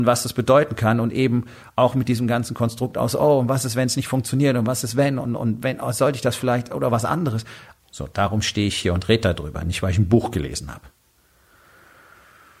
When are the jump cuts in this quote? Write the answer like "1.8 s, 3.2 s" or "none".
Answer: 7.8 s